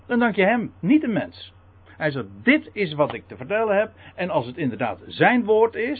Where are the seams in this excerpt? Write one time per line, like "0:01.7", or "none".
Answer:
0:01.9